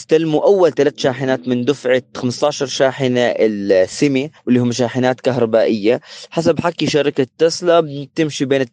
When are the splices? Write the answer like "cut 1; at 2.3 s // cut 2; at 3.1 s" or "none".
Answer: cut 1; at 4.4 s